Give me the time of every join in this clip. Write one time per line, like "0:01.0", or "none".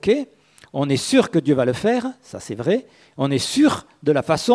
none